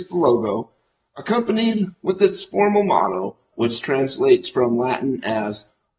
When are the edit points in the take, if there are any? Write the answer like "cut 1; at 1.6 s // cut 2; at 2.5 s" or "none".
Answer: cut 1; at 3.5 s